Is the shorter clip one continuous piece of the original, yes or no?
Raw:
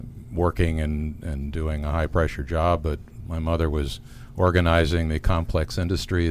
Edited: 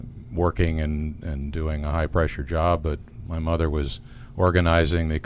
yes